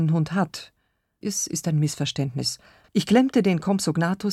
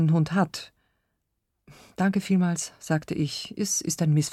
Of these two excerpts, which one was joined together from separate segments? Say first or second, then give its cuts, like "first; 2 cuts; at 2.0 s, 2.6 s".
first; 2 cuts; at 1.2 s, 2.8 s